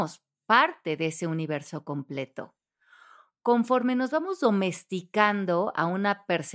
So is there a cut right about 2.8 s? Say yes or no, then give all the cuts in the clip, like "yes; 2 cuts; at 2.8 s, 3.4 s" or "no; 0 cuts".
no; 0 cuts